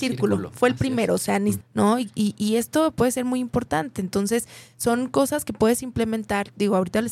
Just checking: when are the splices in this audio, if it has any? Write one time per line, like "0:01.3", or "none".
0:01.6